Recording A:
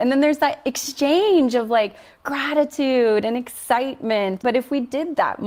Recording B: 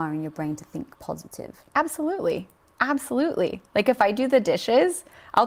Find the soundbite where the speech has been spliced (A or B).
A